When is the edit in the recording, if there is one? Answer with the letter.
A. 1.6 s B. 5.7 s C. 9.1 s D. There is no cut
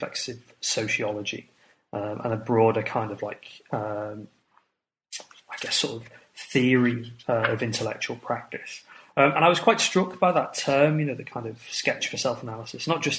D